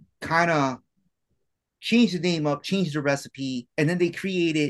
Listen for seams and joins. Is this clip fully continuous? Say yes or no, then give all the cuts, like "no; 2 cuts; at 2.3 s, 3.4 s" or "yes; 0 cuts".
no; 1 cut; at 3.7 s